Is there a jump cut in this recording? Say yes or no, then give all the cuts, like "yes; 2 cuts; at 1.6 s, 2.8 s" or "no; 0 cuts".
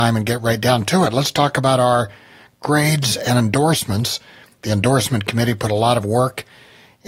no; 0 cuts